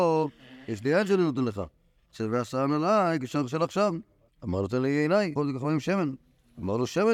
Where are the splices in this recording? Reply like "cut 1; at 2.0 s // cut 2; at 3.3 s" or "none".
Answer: cut 1; at 4.3 s // cut 2; at 5.4 s